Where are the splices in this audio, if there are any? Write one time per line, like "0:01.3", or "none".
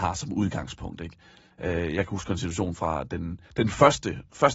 0:03.5